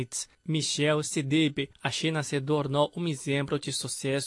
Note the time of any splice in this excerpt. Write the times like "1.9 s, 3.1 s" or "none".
1.7 s